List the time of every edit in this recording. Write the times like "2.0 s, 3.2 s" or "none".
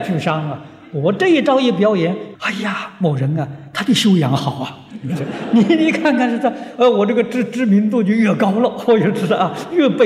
2.4 s